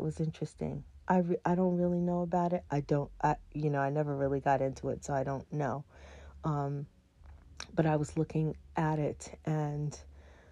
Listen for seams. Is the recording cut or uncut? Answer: cut